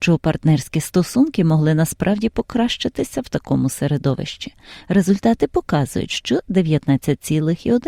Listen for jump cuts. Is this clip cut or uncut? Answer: uncut